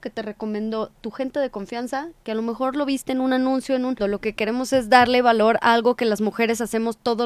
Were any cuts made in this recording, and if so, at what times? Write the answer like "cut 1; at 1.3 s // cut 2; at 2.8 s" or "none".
cut 1; at 4.0 s